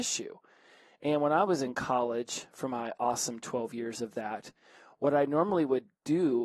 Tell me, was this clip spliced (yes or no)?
no